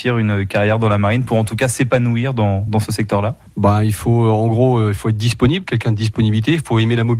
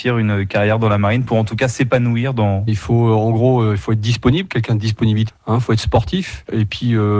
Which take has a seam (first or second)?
second